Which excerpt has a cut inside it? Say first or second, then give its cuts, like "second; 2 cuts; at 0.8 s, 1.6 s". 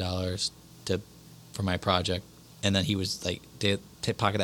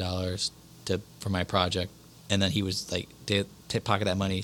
second; 1 cut; at 1.1 s